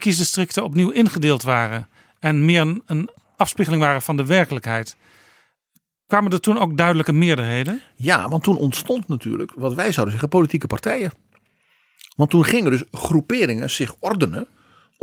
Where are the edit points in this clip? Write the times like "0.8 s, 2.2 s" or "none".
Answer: none